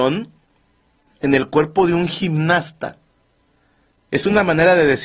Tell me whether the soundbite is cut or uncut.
uncut